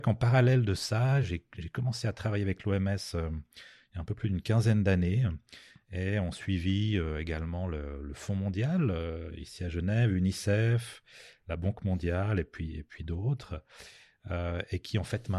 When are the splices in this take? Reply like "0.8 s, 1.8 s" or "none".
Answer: none